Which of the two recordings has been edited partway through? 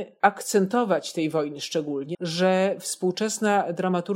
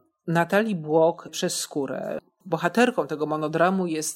first; 1 cut; at 2.1 s

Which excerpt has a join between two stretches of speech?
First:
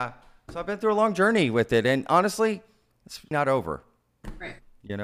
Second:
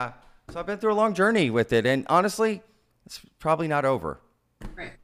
first; 1 cut; at 3.3 s

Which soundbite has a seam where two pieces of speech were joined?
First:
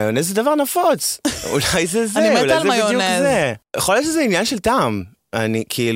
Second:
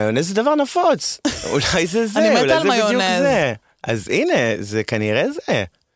first; 1 cut; at 3.6 s

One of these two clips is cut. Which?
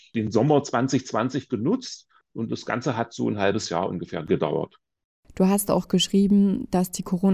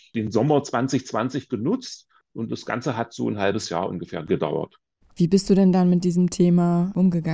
second; 1 cut; at 5.0 s

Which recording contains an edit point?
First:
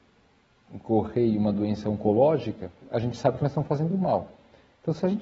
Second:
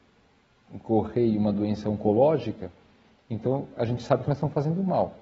first; 1 cut; at 2.8 s

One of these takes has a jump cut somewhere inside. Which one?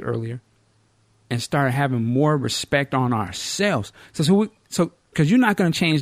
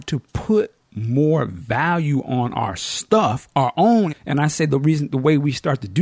second; 1 cut; at 4.1 s

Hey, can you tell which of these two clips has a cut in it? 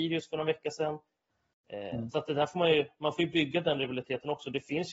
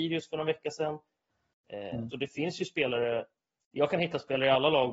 second; 1 cut; at 2.1 s

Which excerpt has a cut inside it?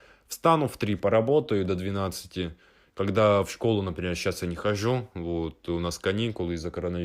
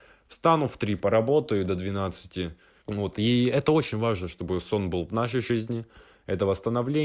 second; 1 cut; at 2.8 s

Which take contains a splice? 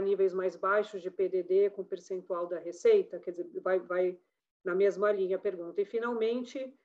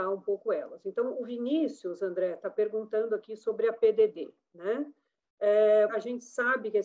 second; 1 cut; at 5.9 s

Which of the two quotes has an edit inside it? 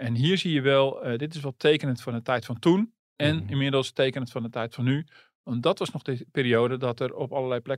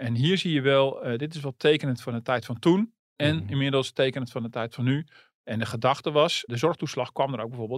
second; 2 cuts; at 5.3 s, 6.5 s

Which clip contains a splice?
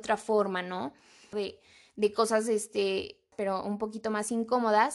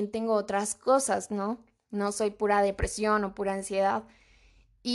first; 2 cuts; at 1.3 s, 3.3 s

